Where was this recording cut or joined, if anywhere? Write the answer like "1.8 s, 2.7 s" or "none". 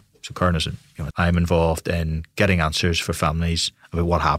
1.1 s